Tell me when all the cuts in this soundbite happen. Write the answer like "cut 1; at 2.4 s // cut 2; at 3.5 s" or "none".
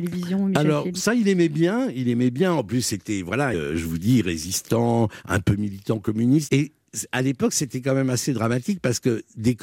cut 1; at 3.5 s // cut 2; at 6.5 s